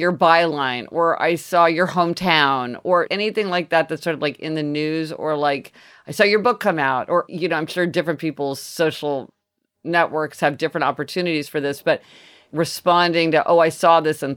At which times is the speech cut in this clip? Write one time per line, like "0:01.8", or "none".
none